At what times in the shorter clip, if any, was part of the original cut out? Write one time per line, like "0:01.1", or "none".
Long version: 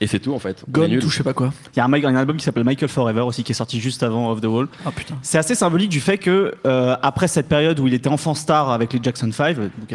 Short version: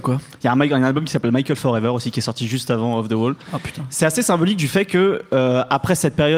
none